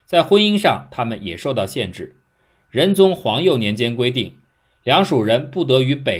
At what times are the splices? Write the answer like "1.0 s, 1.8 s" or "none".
none